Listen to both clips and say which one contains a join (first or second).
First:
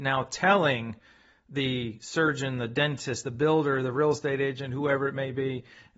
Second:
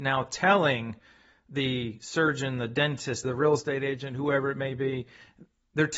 second